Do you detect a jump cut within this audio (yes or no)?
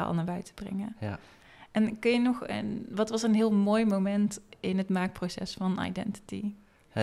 no